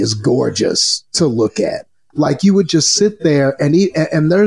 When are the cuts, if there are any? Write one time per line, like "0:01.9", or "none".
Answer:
0:02.1